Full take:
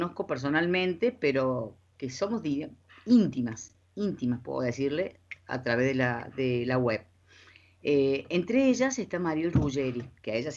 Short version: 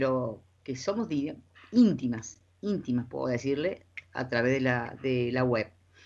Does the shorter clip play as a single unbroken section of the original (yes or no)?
yes